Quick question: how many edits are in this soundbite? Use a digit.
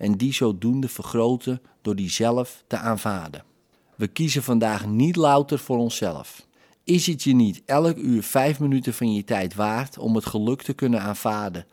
1